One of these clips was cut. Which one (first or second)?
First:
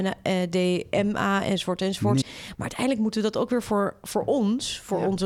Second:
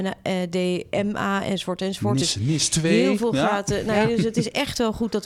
first